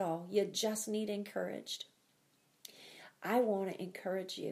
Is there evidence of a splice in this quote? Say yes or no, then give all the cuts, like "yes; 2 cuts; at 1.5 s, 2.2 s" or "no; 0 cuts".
no; 0 cuts